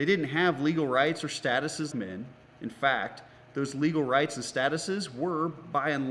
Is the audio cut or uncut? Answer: cut